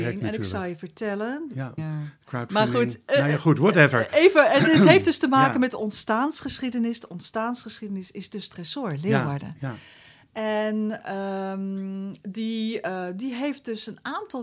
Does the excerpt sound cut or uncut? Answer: cut